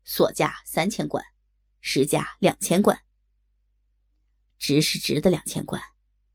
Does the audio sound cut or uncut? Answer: uncut